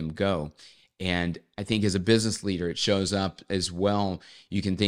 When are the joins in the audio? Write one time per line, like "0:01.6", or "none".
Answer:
none